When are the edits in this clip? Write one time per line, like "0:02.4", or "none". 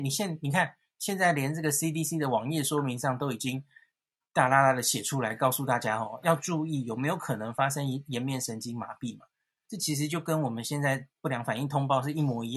0:06.2
0:09.6